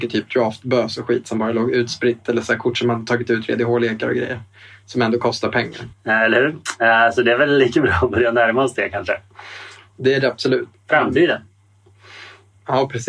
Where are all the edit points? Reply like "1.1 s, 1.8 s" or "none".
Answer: 5.9 s, 10.7 s